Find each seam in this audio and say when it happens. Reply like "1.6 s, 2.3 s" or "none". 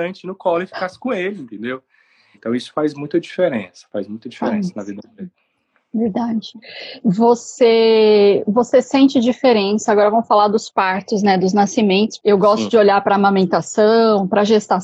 2.3 s

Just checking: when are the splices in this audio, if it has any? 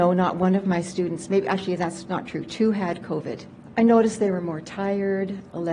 3.7 s

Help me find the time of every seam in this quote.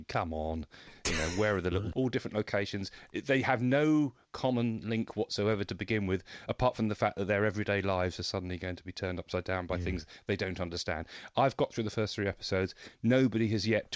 1.9 s

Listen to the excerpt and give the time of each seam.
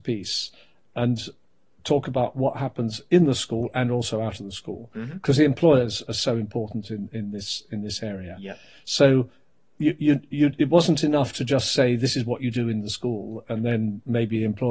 none

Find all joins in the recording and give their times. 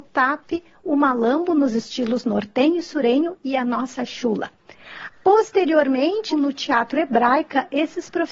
5.1 s, 6.3 s

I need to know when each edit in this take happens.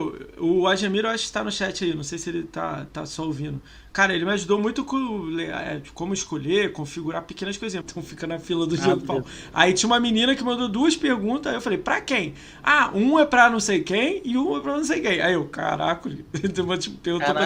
7.8 s

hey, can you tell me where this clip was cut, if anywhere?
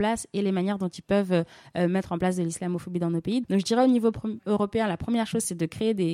3.4 s

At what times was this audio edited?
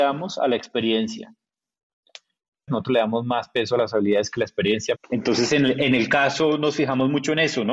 2.7 s, 5.0 s

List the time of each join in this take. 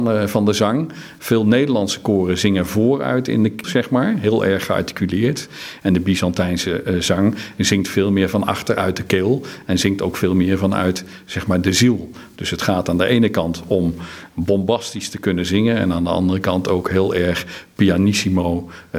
3.6 s

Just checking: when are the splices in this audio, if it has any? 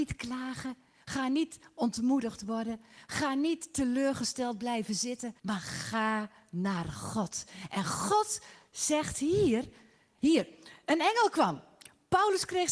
5.4 s, 10.2 s

